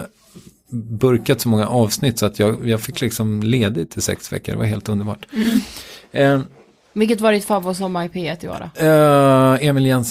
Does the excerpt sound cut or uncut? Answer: uncut